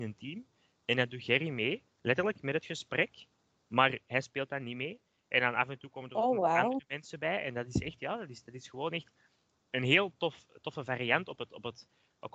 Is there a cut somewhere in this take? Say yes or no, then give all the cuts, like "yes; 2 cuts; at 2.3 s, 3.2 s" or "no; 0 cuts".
no; 0 cuts